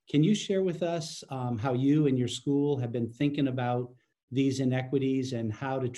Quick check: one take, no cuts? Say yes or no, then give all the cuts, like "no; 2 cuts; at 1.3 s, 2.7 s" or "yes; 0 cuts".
yes; 0 cuts